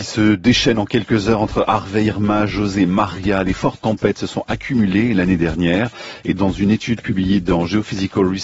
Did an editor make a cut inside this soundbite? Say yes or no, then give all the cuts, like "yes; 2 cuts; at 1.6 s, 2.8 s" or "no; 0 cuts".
no; 0 cuts